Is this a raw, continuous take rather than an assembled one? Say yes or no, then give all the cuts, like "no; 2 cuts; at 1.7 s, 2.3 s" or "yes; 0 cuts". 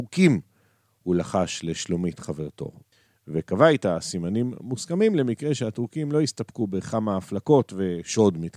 yes; 0 cuts